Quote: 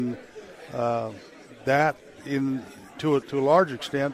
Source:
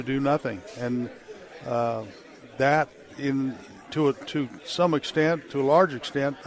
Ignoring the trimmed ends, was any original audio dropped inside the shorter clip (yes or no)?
yes